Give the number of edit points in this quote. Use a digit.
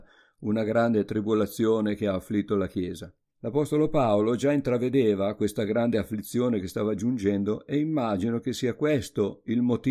1